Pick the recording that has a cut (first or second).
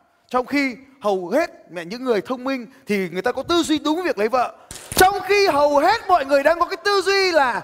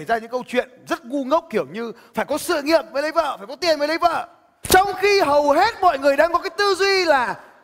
second